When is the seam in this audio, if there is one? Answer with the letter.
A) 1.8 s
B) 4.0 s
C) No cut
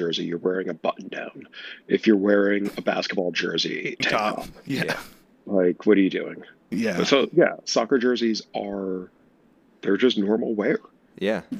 B